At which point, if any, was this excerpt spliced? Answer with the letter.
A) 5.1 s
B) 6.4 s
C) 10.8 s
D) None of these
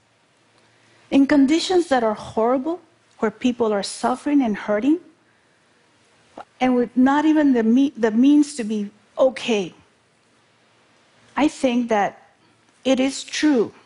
B